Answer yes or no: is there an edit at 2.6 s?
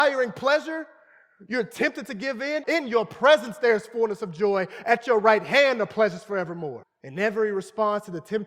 yes